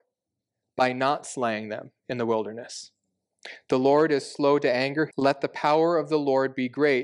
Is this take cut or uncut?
cut